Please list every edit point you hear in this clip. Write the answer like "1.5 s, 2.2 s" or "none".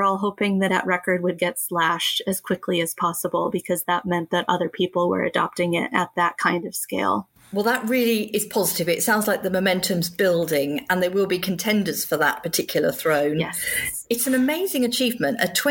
none